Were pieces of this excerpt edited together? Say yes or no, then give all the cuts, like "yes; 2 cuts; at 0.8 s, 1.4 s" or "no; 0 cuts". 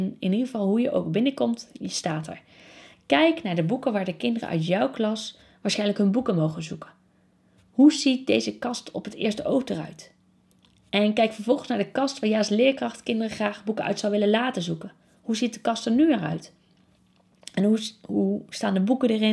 no; 0 cuts